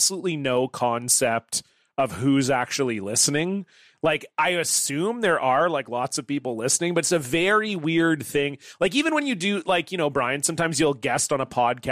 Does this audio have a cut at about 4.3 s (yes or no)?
no